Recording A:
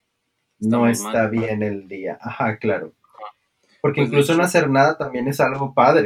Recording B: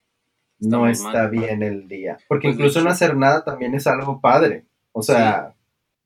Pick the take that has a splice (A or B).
B